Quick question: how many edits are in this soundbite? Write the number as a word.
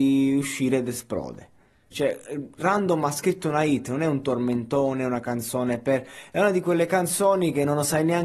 one